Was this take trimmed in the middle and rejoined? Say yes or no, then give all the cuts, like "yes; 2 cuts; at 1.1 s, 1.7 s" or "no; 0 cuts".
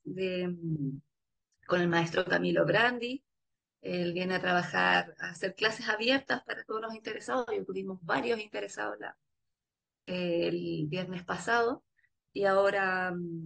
no; 0 cuts